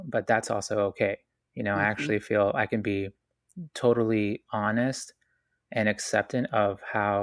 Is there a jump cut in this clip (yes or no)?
no